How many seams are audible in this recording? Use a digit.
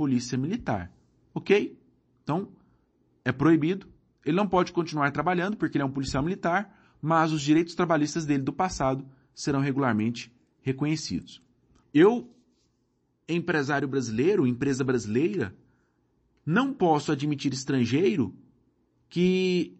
2